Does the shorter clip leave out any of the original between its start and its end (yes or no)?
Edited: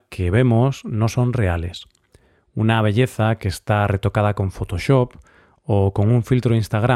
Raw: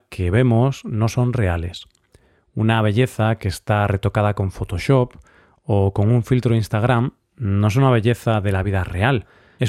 no